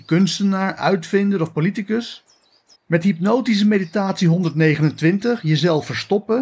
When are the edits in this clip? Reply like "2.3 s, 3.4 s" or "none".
2.7 s